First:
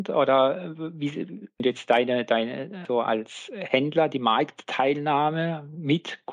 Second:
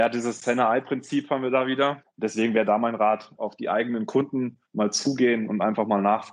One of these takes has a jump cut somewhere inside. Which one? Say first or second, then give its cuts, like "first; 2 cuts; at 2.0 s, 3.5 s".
second; 3 cuts; at 2.0 s, 3.4 s, 4.7 s